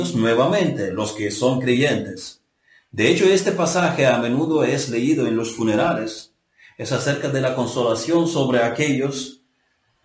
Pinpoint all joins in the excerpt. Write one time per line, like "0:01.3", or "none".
none